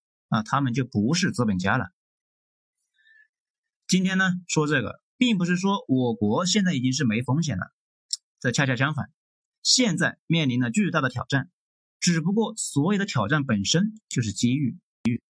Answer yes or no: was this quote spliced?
no